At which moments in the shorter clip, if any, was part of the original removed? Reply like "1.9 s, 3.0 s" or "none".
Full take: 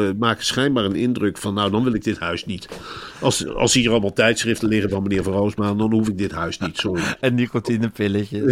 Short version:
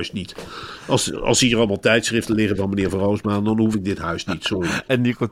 none

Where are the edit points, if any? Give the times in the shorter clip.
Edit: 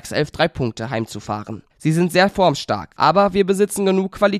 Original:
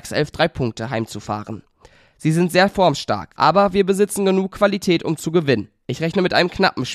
1.7 s

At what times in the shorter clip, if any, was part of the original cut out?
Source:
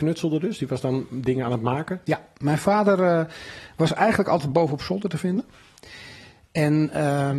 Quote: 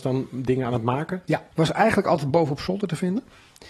1.5 s

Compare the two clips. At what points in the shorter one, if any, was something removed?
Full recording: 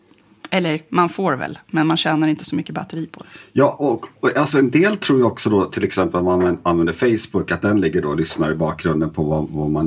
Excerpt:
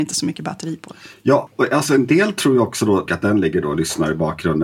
1.5 s, 3.1 s

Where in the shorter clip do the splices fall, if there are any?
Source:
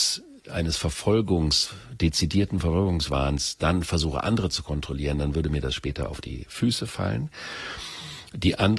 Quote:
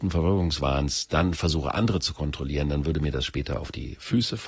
none

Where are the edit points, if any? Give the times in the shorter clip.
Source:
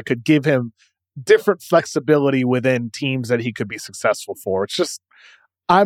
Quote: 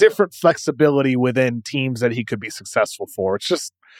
none

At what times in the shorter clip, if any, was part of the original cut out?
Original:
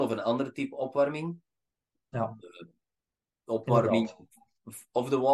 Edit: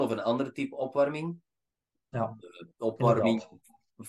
2.7 s

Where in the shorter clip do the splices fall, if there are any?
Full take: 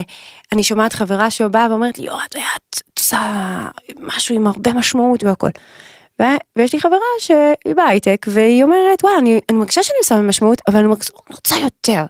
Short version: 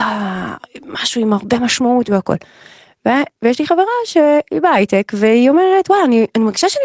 none

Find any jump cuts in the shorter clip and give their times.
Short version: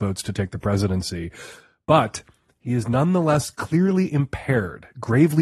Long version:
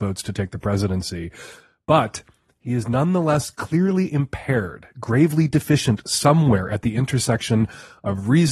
none

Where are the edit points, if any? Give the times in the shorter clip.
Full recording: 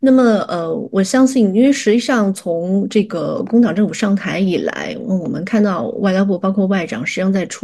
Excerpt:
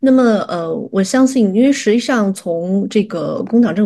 none

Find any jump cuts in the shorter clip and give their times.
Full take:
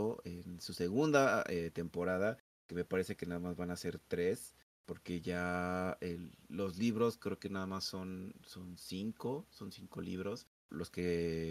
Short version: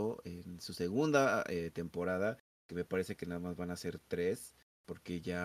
none

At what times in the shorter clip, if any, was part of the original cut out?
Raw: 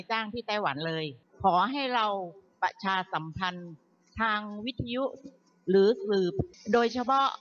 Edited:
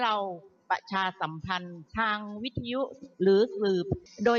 1.9 s, 3.1 s

